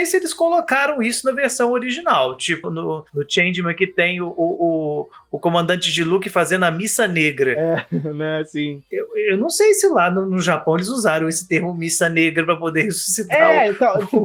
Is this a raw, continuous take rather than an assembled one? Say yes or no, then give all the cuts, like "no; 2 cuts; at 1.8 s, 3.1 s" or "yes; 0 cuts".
no; 1 cut; at 2.6 s